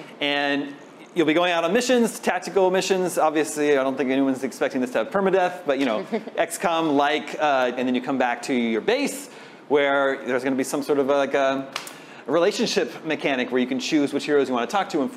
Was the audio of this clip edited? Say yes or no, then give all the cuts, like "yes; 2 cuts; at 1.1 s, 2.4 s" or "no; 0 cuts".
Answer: yes; 1 cut; at 7.8 s